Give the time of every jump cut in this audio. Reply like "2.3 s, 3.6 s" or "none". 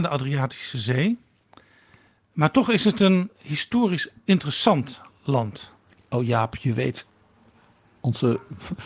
none